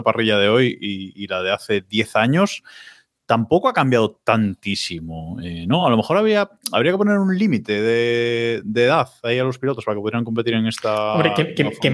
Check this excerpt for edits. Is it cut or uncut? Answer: uncut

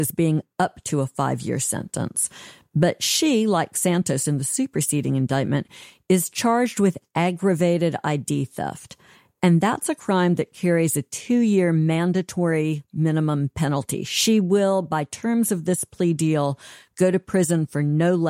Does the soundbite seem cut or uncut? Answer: uncut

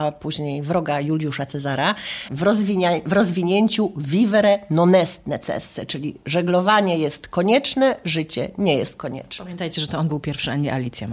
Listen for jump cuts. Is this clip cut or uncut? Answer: cut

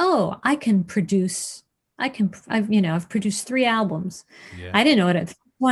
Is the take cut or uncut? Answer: uncut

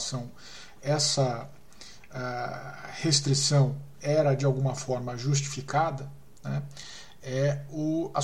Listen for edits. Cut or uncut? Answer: uncut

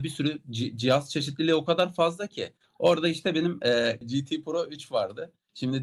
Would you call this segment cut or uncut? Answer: cut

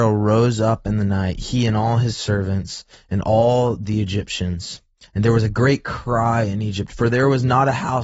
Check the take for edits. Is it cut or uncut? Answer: uncut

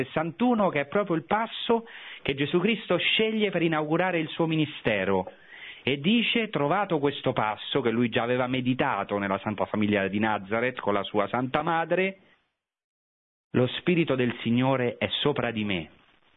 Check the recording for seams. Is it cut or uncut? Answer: uncut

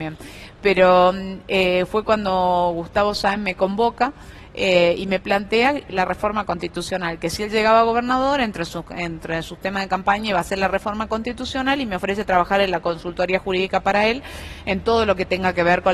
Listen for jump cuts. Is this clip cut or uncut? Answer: uncut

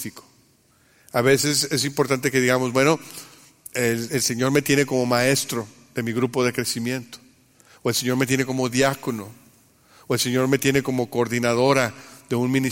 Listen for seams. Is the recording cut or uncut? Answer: uncut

